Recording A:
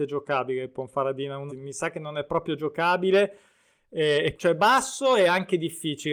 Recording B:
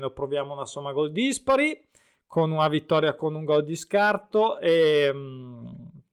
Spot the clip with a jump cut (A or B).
A